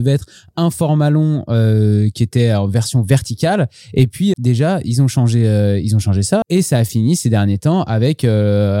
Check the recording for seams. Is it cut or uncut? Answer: cut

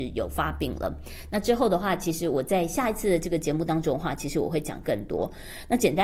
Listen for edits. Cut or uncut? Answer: uncut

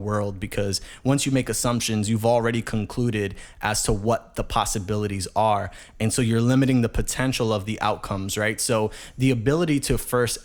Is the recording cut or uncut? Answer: uncut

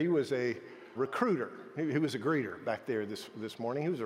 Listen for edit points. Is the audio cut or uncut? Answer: cut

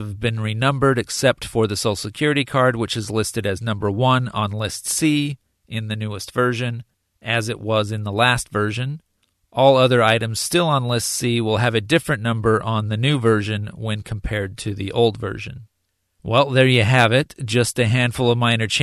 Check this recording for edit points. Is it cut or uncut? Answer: uncut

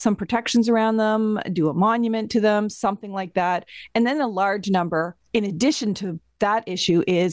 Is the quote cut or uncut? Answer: uncut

